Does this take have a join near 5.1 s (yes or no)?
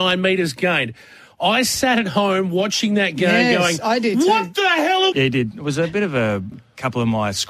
yes